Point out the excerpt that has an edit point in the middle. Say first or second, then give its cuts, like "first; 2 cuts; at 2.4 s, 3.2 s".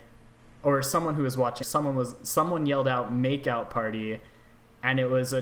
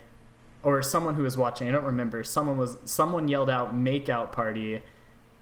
first; 1 cut; at 1.6 s